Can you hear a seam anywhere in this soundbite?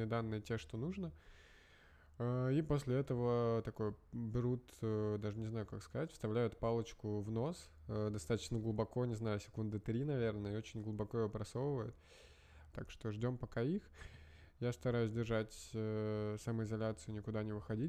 yes; 1 cut; at 12.7 s

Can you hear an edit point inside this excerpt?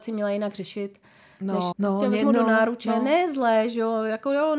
yes; 1 cut; at 1.7 s

